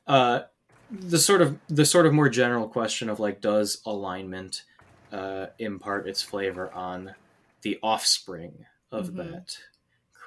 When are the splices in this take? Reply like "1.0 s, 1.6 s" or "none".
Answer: none